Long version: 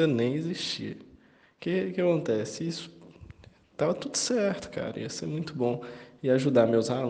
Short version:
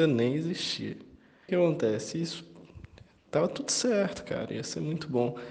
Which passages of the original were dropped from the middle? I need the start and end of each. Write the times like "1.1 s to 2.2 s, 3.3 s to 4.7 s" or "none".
1.5 s to 1.9 s

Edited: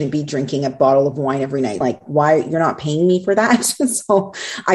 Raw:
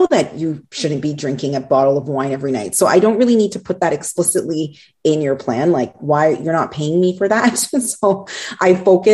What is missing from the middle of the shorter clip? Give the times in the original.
2.7 s to 5.7 s

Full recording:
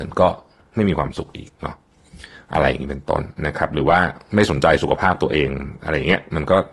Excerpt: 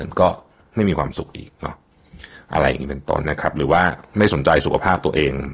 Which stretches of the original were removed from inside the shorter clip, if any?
3.2 s to 3.4 s

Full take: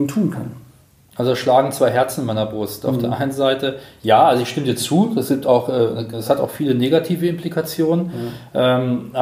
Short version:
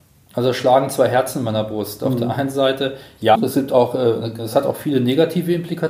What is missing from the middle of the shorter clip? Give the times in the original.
4.2 s to 5.1 s

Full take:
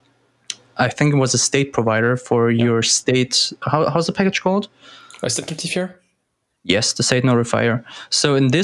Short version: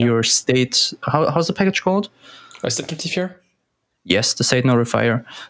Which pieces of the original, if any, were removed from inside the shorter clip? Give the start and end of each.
none

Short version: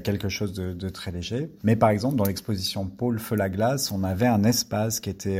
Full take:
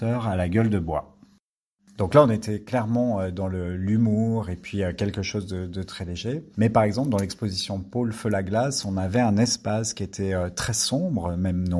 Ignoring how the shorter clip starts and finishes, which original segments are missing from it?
none

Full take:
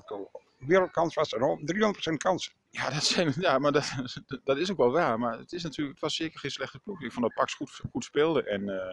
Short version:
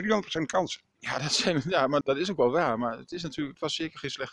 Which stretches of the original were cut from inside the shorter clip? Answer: 3.7 s to 4.4 s

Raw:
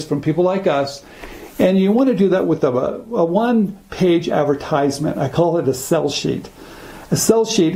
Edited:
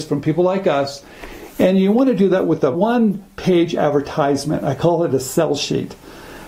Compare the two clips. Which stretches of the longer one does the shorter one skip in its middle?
2.7 s to 3.3 s

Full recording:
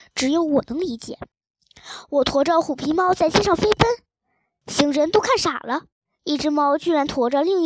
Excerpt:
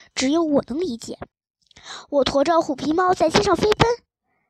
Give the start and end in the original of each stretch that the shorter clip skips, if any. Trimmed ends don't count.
none

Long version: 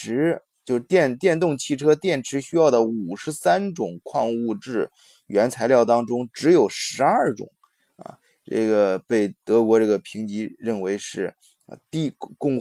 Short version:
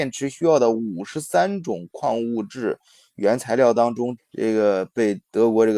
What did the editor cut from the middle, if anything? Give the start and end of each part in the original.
6.3 s to 8.3 s

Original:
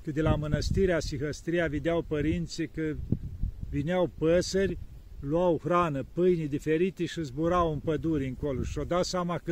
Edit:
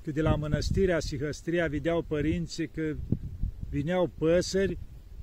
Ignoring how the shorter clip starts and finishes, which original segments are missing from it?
none

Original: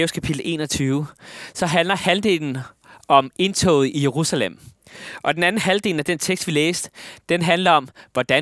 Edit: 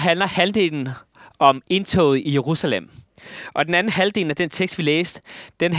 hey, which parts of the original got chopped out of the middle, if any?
none

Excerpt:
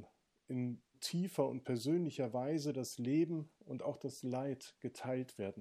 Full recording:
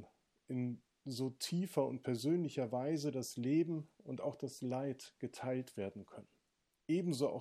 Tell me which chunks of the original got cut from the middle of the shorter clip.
0.9 s to 1.3 s

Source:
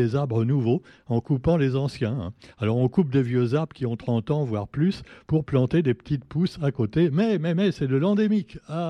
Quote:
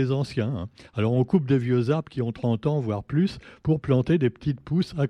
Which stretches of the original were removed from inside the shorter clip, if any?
none

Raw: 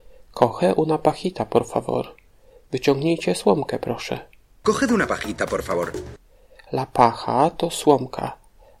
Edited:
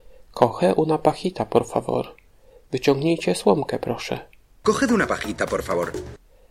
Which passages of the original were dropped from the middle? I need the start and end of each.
none

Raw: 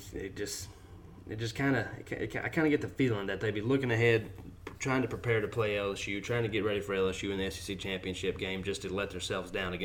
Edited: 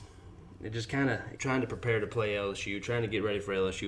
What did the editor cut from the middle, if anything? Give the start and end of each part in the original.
2.0 s to 4.8 s

